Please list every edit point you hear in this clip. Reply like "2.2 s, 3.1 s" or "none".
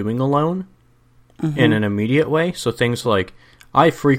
none